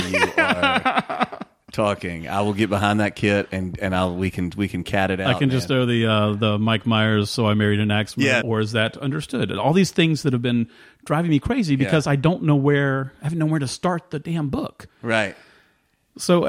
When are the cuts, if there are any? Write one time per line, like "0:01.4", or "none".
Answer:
0:08.4